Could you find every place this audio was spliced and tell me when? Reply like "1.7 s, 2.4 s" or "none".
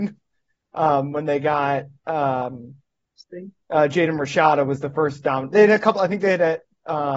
none